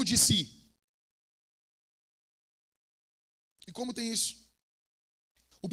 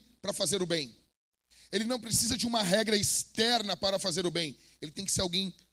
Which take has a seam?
first; 1 cut; at 3.5 s

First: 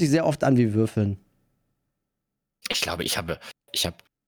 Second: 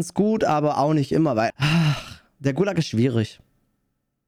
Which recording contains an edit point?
second; 1 cut; at 1.5 s

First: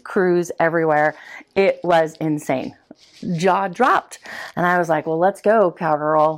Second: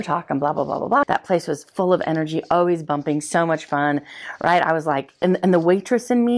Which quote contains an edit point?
second; 1 cut; at 1.0 s

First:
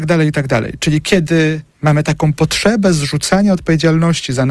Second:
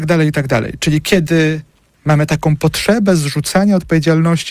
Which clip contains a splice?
first; 1 cut; at 1.7 s

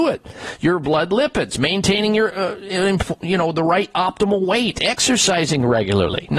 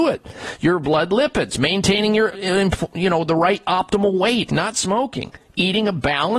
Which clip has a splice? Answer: second; 2 cuts; at 2.3 s, 4.5 s

